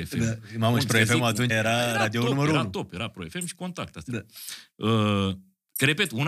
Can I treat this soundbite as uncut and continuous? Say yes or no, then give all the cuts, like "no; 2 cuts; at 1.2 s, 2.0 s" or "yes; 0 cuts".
no; 1 cut; at 1.5 s